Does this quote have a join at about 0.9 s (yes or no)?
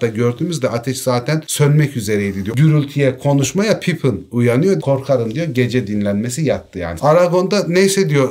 no